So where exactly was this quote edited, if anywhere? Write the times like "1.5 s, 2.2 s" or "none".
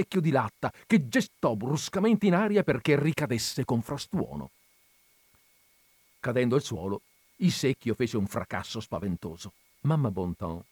9.6 s